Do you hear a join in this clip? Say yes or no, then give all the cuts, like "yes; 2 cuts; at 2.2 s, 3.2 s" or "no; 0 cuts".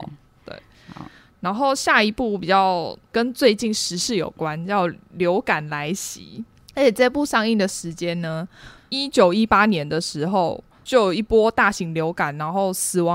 yes; 1 cut; at 8.8 s